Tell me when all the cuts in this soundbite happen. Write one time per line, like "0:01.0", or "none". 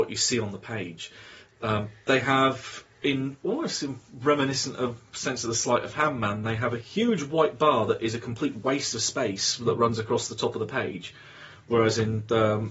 none